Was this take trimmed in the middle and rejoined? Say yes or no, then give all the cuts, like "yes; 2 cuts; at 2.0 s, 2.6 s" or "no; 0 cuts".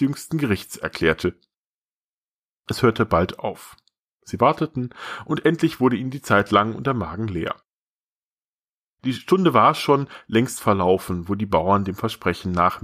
no; 0 cuts